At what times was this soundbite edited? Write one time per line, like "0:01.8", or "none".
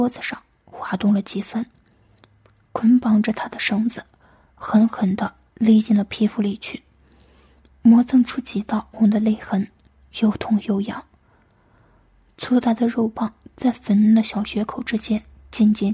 0:08.9